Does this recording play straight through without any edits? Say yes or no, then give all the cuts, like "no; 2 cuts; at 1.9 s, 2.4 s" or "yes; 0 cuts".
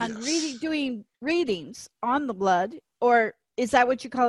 no; 1 cut; at 1.1 s